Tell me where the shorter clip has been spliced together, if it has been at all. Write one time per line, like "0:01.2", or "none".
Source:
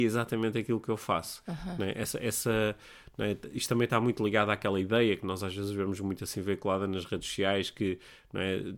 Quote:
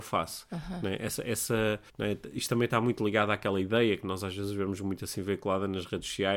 0:01.9